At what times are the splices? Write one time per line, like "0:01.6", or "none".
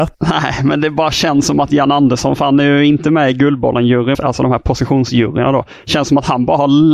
0:04.1